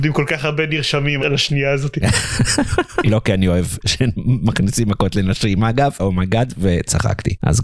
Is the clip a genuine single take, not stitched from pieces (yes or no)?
no